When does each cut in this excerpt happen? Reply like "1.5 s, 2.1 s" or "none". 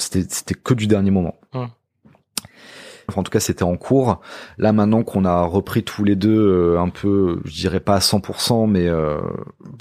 3.1 s